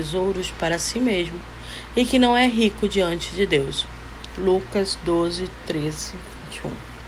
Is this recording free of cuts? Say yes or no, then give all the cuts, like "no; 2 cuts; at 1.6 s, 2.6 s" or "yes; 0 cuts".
yes; 0 cuts